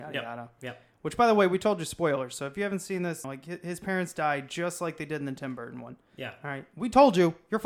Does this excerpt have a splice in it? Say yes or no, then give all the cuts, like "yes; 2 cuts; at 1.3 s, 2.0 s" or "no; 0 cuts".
yes; 1 cut; at 3.2 s